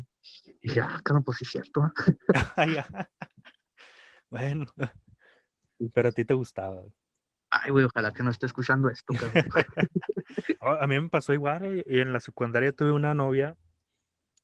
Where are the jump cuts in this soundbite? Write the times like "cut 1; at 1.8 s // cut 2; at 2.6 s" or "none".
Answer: none